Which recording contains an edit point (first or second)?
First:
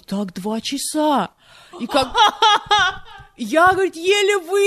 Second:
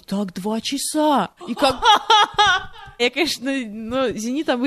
second